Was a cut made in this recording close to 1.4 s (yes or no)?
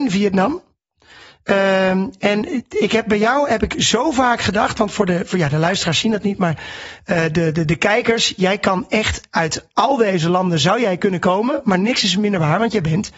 no